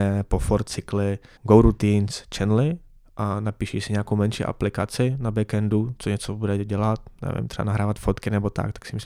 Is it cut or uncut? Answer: cut